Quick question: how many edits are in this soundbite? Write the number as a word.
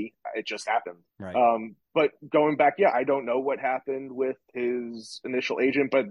three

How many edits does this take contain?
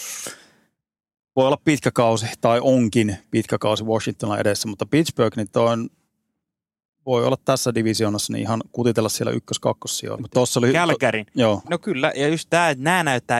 two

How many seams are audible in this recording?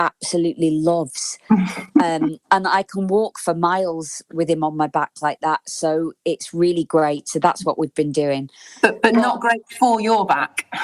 zero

